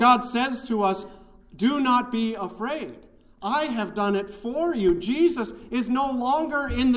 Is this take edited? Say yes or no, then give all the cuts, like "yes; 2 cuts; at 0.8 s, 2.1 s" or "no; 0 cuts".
no; 0 cuts